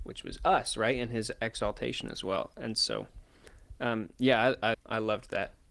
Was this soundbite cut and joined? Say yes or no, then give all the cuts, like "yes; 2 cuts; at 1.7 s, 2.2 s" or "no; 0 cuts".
yes; 1 cut; at 4.7 s